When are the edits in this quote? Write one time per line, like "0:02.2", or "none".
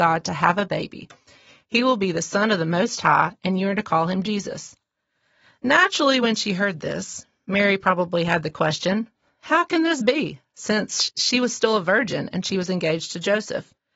none

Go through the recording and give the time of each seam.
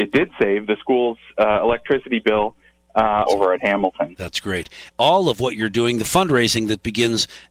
0:03.2
0:04.9

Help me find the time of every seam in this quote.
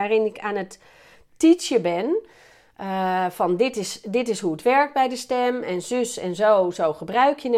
none

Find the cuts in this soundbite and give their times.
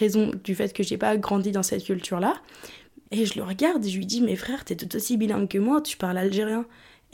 0:03.0

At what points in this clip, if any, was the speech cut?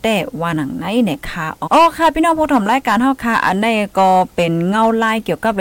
0:01.7

